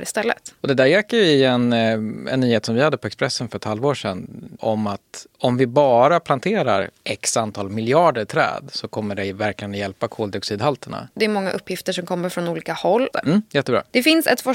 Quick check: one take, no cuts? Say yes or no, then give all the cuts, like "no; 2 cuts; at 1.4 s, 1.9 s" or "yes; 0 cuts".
no; 2 cuts; at 11.1 s, 13.1 s